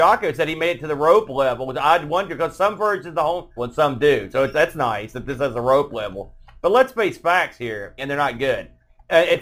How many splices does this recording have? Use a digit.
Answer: 2